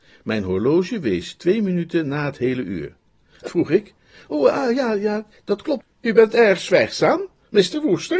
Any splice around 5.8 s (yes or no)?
yes